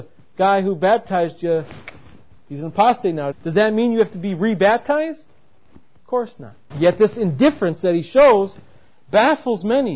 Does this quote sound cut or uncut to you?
cut